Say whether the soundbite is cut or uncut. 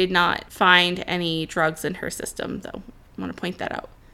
cut